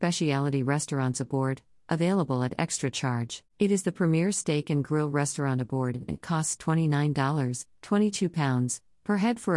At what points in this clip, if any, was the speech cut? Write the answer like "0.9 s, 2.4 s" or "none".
3.5 s

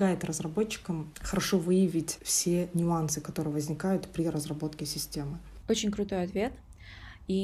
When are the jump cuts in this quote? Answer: 5.6 s

